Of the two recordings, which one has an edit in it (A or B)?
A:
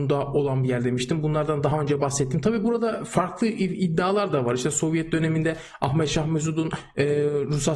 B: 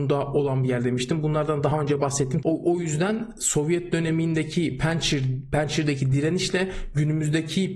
B